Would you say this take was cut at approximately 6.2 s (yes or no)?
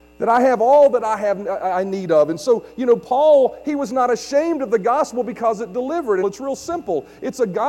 yes